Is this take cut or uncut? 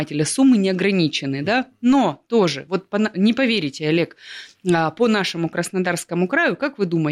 uncut